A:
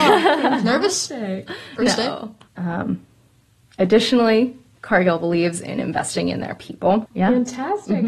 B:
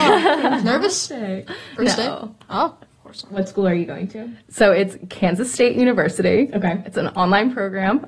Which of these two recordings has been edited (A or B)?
A